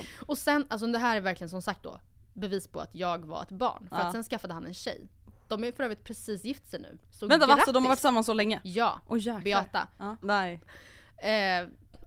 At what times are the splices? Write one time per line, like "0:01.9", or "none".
0:10.2